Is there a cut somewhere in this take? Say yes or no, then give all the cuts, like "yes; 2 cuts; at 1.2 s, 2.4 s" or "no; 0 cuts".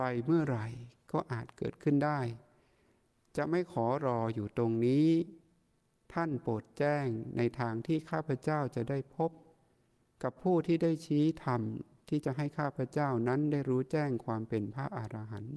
no; 0 cuts